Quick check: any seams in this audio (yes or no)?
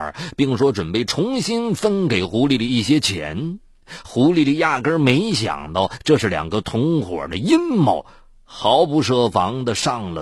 no